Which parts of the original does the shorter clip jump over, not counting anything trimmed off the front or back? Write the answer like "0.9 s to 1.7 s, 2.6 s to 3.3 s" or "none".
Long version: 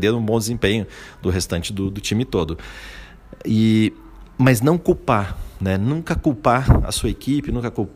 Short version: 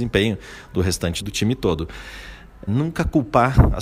1.7 s to 1.9 s, 3.4 s to 5.8 s